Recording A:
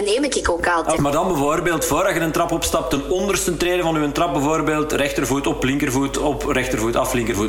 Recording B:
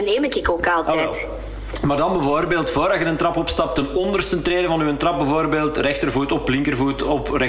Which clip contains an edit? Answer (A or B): A